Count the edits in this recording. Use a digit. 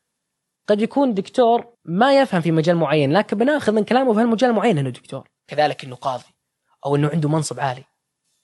1